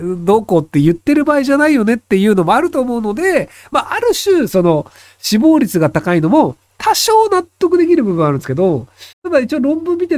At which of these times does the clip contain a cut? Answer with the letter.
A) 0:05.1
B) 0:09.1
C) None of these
B